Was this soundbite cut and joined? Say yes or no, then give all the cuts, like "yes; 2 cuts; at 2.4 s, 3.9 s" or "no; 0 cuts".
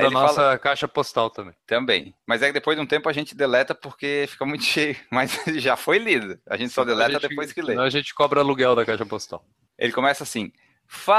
yes; 1 cut; at 1.6 s